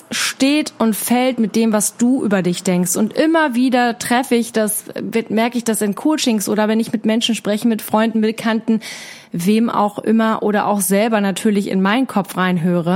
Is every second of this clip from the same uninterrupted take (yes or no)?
yes